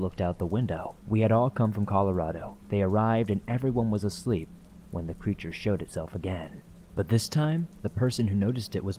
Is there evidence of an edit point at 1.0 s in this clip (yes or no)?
yes